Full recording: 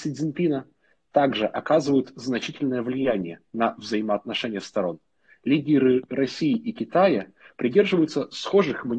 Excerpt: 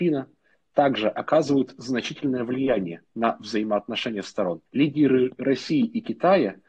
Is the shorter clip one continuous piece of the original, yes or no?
no